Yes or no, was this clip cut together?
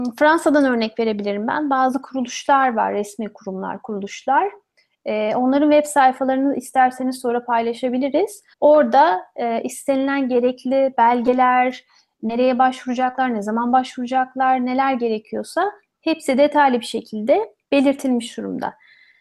yes